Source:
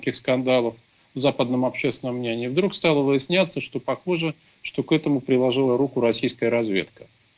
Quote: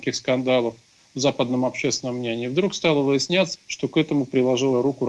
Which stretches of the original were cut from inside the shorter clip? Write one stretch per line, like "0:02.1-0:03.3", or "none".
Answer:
0:03.5-0:04.5